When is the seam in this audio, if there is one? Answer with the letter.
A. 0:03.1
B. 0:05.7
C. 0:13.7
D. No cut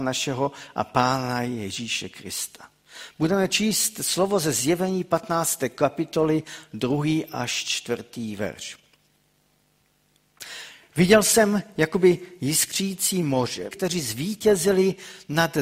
C